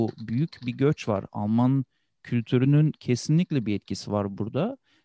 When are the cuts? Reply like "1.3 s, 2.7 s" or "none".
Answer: none

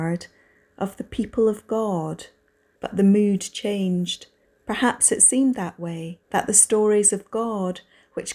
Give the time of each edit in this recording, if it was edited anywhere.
2.8 s, 4.4 s, 6.2 s

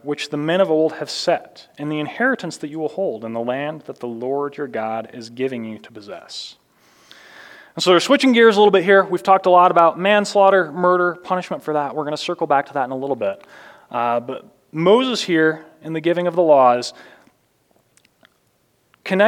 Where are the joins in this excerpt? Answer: none

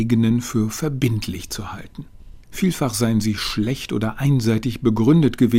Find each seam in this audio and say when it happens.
2.4 s

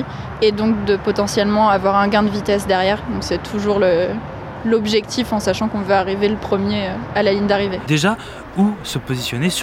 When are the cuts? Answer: 7.9 s

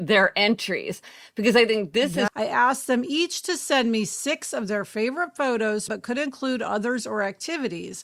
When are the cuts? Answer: 2.3 s, 5.9 s

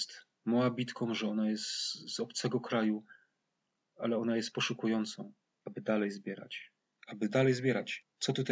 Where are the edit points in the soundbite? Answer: 5.6 s

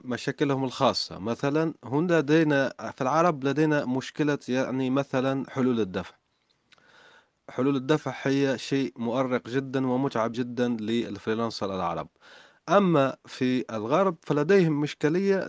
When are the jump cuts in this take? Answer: 10.3 s

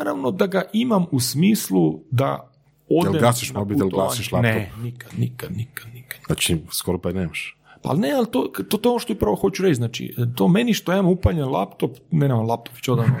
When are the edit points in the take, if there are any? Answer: none

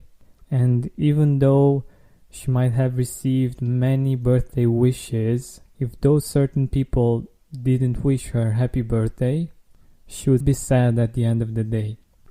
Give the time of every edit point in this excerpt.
5.7 s, 10.4 s

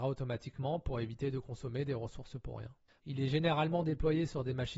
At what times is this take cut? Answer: 3.0 s

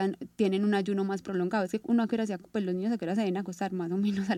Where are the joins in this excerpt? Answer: none

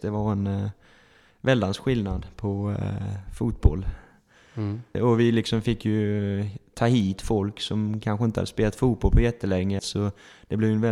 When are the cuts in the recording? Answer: 4.9 s, 9.8 s

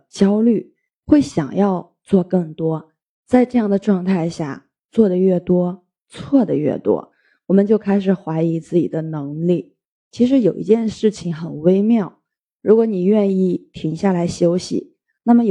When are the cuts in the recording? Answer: 10.1 s

